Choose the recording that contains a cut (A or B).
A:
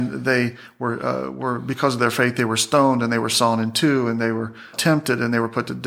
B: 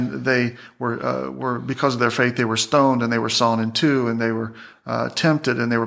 A